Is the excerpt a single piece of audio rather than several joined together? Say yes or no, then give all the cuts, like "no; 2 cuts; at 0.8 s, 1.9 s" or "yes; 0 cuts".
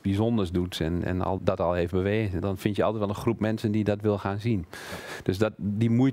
no; 2 cuts; at 1.4 s, 2.4 s